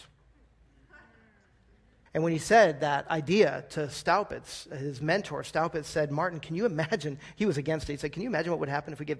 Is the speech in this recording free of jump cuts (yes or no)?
no